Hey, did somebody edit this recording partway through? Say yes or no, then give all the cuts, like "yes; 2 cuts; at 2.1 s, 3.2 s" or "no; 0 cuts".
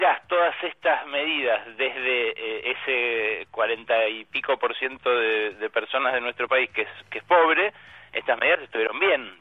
no; 0 cuts